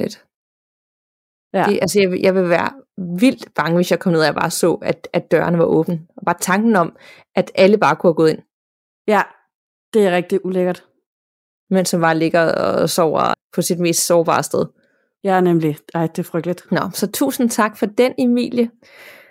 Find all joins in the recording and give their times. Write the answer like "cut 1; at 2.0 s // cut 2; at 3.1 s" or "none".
cut 1; at 13.3 s // cut 2; at 16.7 s

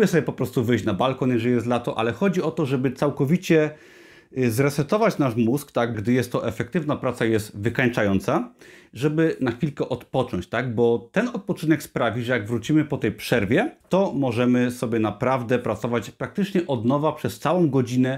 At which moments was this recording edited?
cut 1; at 5.9 s // cut 2; at 13.8 s

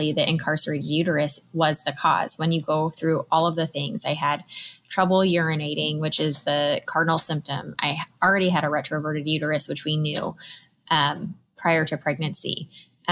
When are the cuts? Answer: none

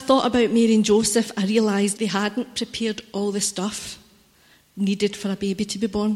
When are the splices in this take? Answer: cut 1; at 1.9 s

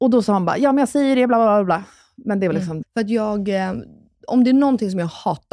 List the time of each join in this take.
cut 1; at 2.8 s

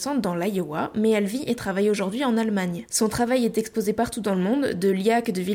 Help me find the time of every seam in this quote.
cut 1; at 2.9 s

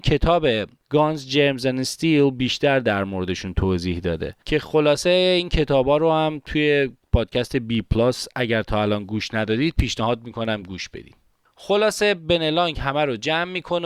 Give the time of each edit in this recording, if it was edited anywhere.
none

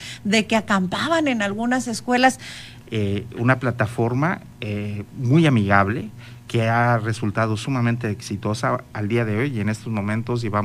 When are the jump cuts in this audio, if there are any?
cut 1; at 2.8 s

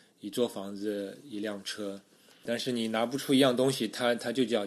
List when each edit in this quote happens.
cut 1; at 2.5 s

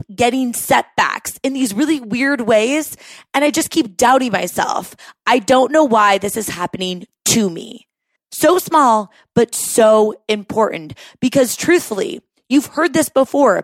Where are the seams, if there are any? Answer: cut 1; at 8.2 s

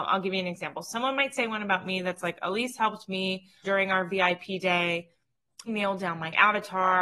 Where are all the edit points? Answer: cut 1; at 3.6 s // cut 2; at 5.7 s

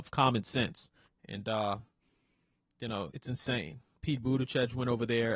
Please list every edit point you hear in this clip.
cut 1; at 1.1 s // cut 2; at 3.1 s

